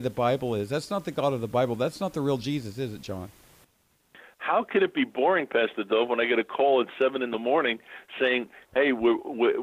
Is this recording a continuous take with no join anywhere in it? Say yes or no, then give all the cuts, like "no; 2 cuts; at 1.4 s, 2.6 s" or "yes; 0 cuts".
yes; 0 cuts